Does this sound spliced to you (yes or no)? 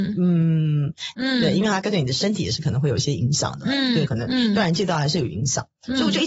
yes